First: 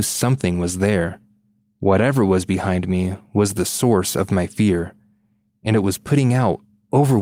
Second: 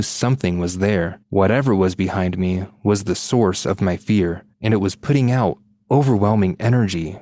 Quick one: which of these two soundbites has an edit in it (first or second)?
second